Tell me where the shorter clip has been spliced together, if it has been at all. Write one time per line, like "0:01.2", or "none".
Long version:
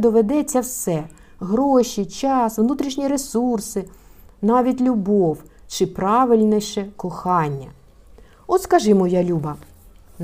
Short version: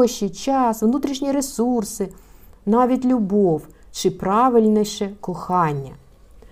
none